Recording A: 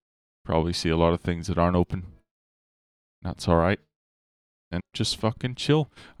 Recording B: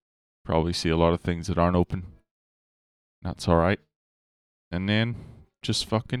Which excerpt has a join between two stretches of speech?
A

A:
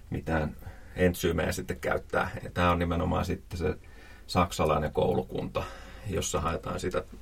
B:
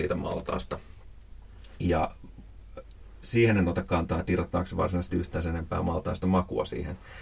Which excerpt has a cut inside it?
A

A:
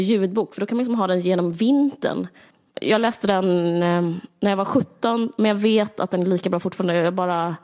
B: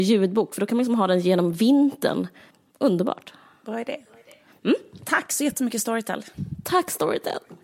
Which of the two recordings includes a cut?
A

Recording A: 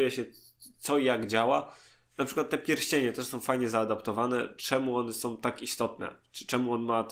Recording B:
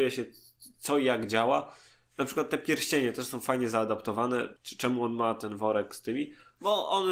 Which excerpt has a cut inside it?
B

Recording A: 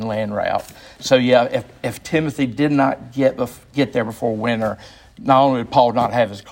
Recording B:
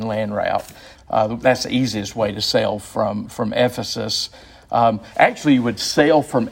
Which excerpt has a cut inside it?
B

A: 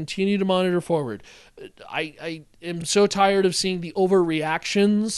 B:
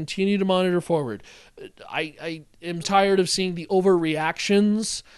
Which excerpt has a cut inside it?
B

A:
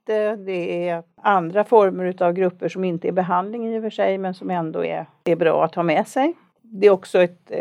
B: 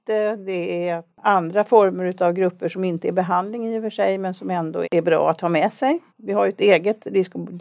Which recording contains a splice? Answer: B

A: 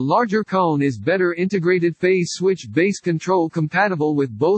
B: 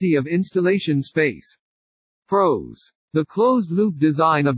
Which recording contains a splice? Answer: B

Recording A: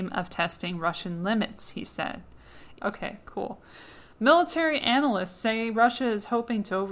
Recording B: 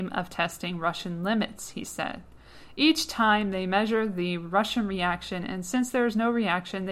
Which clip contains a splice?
A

